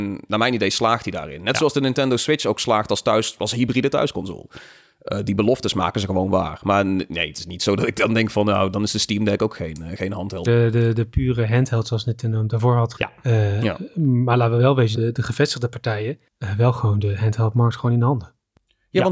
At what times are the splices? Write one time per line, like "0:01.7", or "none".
0:10.4
0:12.9
0:14.9